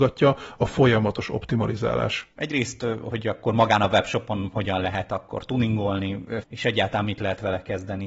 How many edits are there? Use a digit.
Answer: 2